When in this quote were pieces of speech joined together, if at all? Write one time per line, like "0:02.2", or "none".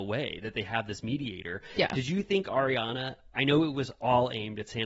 none